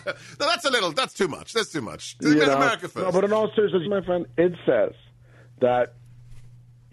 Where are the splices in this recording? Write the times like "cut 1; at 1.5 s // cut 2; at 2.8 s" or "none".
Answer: cut 1; at 3.8 s

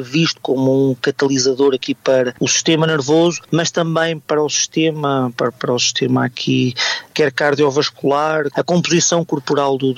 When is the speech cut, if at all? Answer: cut 1; at 8.5 s

